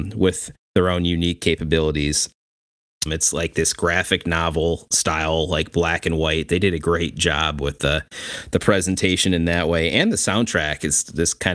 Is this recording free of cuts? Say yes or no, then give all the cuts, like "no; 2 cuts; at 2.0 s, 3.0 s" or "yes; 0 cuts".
no; 1 cut; at 3.1 s